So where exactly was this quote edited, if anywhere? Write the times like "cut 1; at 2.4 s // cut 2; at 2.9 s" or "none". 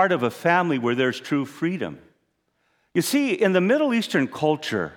none